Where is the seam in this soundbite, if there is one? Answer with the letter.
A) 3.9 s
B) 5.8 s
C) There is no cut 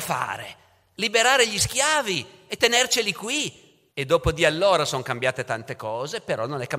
A